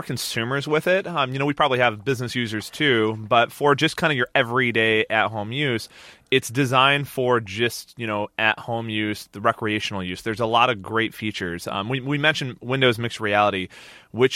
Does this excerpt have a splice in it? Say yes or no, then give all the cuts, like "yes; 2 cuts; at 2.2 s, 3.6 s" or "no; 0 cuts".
no; 0 cuts